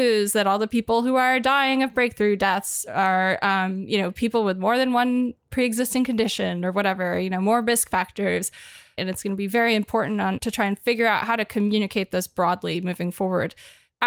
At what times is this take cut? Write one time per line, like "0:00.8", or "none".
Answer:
0:09.0
0:10.4